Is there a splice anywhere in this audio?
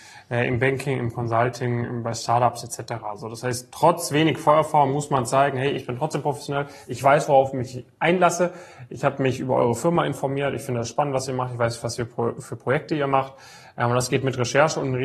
no; 0 cuts

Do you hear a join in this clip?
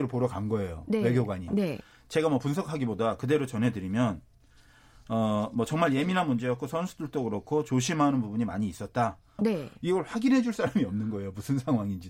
yes; 2 cuts; at 1.5 s, 9.4 s

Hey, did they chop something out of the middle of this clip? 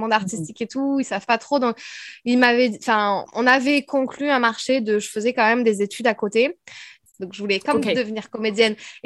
yes; 2 cuts; at 3.3 s, 7.1 s

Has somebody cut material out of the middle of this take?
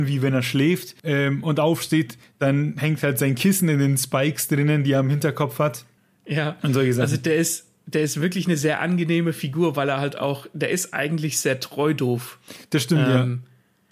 yes; 1 cut; at 1.0 s

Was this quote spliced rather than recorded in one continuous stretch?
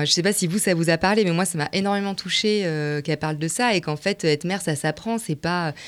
no; 0 cuts

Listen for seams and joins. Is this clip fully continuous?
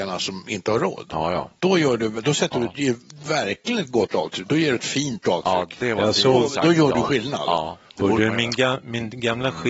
yes; 0 cuts

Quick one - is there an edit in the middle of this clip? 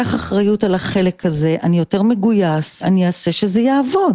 yes; 1 cut; at 2.8 s

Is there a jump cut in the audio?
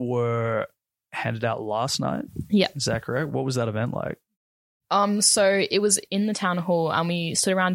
no; 0 cuts

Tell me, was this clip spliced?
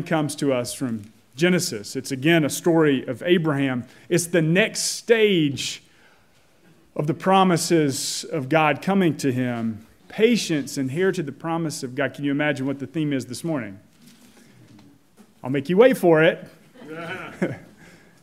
yes; 1 cut; at 10.0 s

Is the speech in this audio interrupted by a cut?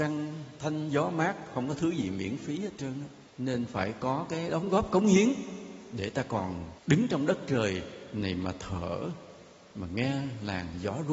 yes; 2 cuts; at 3.3 s, 6.8 s

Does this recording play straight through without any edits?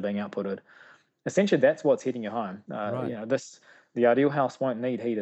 yes; 0 cuts

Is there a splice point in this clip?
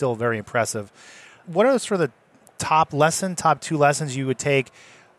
no; 0 cuts

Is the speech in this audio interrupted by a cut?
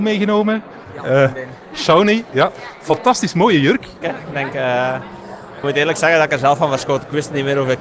yes; 2 cuts; at 4.0 s, 5.6 s

